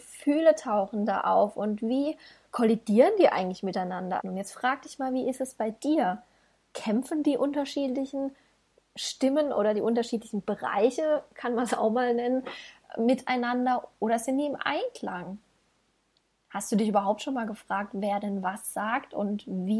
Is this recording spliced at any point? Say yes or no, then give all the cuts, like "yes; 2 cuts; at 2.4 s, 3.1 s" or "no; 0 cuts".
yes; 1 cut; at 4.2 s